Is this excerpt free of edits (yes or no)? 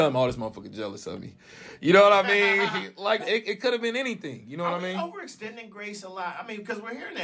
no